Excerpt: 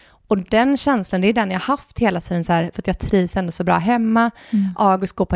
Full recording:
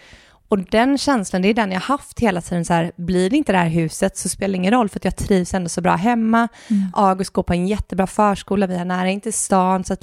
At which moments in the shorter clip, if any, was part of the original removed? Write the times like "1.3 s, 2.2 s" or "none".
2.7 s